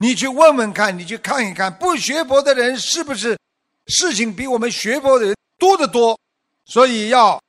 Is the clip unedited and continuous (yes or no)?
yes